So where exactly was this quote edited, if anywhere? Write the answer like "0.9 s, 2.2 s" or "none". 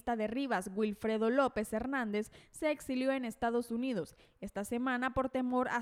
none